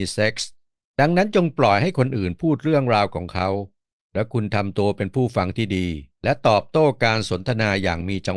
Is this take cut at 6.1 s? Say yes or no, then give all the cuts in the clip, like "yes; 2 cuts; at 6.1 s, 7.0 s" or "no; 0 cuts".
yes; 1 cut; at 6.1 s